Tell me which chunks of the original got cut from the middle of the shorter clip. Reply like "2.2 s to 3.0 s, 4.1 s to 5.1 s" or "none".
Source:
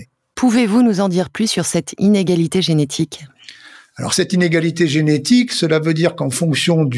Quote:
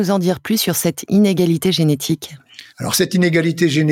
3.6 s to 3.9 s